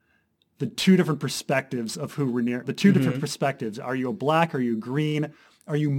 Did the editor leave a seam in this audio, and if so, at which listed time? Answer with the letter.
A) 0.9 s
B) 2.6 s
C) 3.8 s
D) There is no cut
B